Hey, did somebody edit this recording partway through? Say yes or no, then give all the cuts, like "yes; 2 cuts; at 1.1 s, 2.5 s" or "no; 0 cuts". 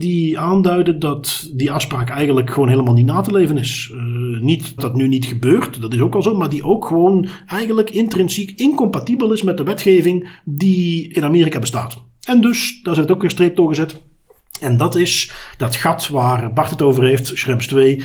yes; 1 cut; at 4.8 s